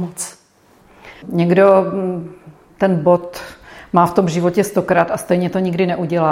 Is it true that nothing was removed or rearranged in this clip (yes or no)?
no